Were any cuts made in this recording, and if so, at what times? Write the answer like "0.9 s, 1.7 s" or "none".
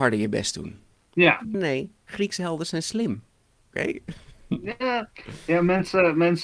1.5 s, 3.7 s